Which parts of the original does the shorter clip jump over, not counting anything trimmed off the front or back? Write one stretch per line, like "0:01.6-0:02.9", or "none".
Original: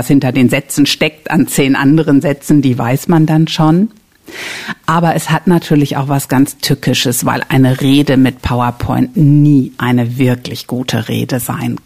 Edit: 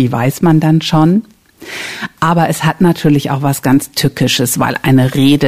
none